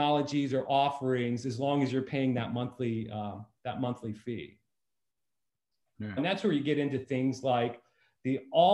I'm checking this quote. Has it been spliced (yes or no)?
yes